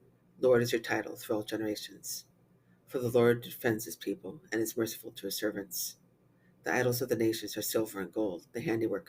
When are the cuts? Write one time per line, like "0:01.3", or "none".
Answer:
none